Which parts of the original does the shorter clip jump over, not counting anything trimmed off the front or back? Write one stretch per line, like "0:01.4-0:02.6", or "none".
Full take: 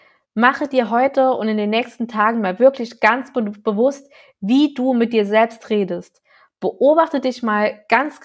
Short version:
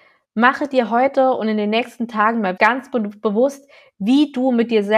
0:02.6-0:03.0